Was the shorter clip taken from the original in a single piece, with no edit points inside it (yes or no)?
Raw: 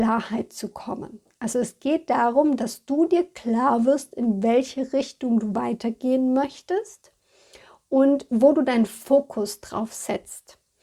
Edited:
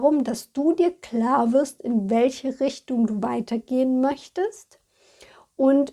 yes